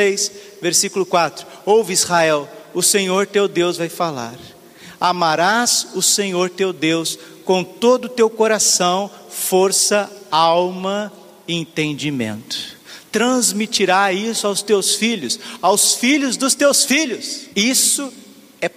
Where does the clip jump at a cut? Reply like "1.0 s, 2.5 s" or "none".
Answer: 17.5 s